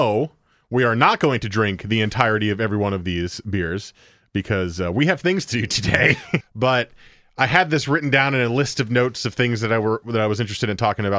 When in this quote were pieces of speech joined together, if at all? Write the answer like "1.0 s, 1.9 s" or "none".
6.4 s